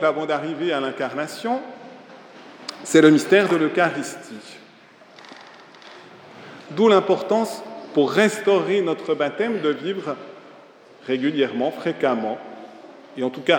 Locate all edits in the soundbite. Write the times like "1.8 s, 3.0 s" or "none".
6.7 s